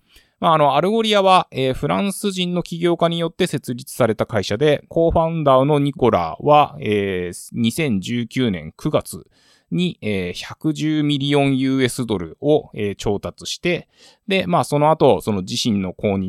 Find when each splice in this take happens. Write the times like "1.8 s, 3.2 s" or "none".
4.9 s